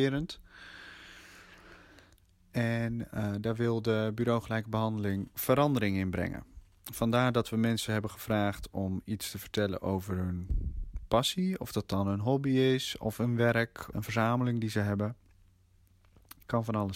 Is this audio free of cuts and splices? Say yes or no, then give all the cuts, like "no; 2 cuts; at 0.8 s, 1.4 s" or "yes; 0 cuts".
no; 1 cut; at 13.9 s